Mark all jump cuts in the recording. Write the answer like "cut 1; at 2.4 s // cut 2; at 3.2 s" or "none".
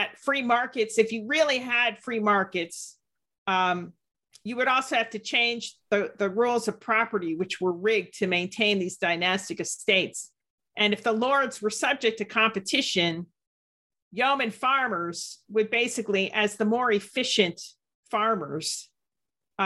none